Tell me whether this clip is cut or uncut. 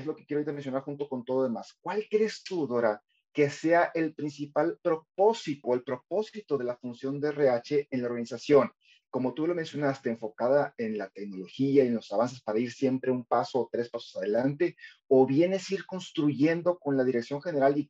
cut